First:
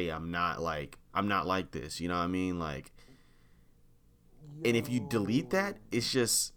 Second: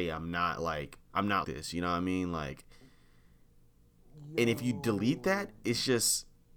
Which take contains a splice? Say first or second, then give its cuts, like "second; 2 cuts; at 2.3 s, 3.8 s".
second; 1 cut; at 1.4 s